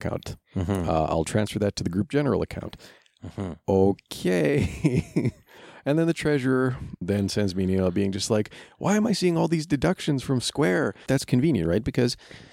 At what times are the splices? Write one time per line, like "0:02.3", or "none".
0:07.0
0:11.1